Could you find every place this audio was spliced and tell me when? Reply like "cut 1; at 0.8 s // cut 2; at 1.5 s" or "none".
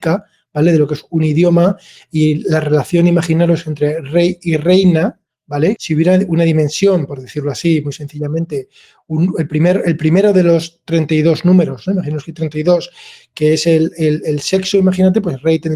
cut 1; at 5.8 s